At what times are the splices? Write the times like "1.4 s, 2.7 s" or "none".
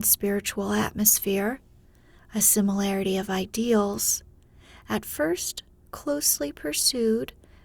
none